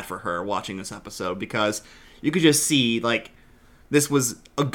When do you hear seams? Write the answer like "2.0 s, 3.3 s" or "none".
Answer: none